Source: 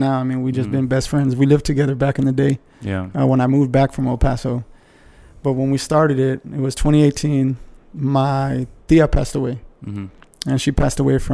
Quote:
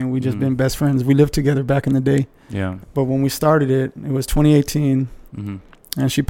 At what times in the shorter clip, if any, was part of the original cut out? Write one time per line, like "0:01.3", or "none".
0:02.8
0:05.3